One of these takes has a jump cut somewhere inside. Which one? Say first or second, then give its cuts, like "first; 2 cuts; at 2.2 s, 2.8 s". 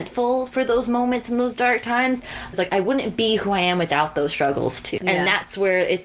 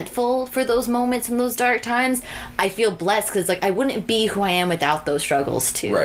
first; 2 cuts; at 2.5 s, 5.0 s